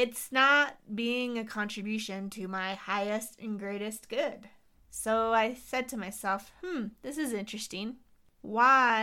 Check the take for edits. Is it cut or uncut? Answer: cut